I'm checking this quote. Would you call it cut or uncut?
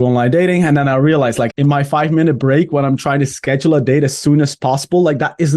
cut